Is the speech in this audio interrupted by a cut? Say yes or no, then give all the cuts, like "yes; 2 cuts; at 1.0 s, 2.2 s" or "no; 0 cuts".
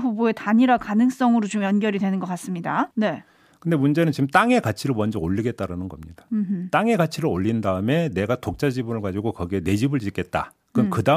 yes; 1 cut; at 2.9 s